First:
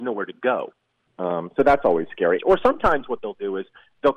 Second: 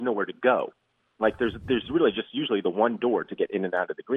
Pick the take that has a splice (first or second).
first